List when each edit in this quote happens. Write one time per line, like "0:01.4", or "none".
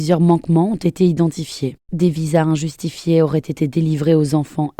none